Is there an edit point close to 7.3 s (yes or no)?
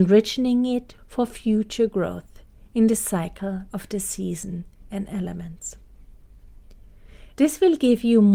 yes